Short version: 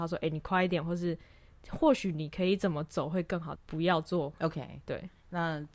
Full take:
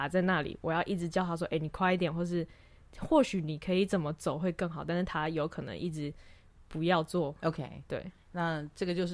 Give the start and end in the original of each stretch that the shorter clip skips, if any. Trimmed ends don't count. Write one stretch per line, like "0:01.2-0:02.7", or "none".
0:04.8-0:06.6